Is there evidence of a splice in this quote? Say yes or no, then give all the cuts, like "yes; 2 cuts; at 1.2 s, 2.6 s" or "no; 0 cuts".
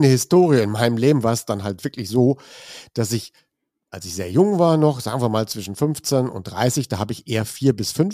no; 0 cuts